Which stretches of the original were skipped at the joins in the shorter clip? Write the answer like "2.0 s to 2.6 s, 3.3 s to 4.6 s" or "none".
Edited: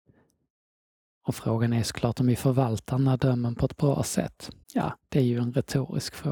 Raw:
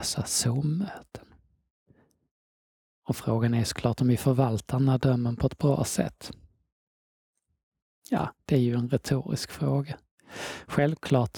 6.4 s to 8.0 s